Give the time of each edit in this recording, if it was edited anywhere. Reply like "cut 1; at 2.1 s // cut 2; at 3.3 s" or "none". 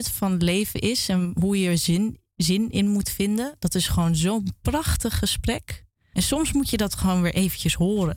cut 1; at 6.1 s